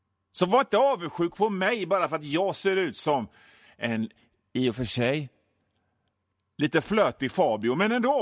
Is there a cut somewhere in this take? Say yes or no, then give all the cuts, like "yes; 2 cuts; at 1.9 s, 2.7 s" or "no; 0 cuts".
no; 0 cuts